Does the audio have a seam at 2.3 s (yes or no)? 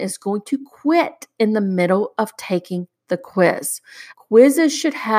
no